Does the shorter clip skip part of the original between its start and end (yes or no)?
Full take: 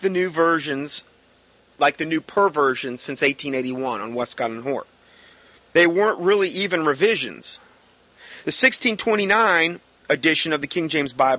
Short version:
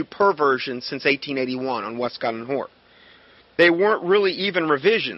no